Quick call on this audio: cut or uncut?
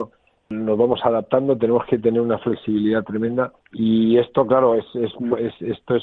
cut